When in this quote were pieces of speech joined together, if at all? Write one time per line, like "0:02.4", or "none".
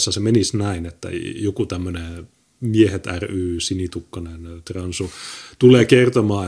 none